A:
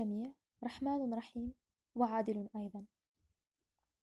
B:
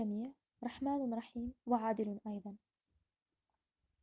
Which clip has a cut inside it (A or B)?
B